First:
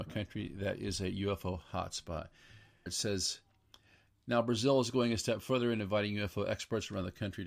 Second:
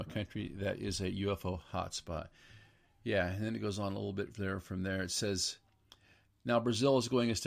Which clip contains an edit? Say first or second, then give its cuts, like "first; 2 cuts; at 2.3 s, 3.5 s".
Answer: first; 1 cut; at 2.9 s